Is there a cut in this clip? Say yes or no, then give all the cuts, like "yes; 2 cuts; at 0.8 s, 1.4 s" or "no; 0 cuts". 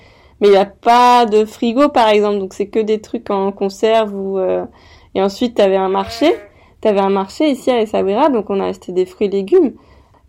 no; 0 cuts